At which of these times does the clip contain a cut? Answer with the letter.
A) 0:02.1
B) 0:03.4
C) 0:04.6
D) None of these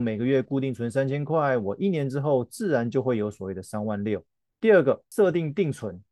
C